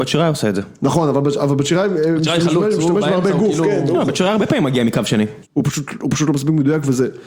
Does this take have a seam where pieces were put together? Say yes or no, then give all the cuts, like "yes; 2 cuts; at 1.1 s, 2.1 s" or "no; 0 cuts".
yes; 1 cut; at 5.4 s